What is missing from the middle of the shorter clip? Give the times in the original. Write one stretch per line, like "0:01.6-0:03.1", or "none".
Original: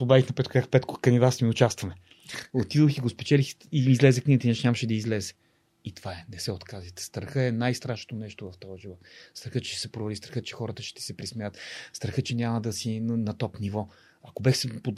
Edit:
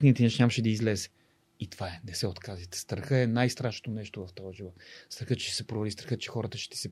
none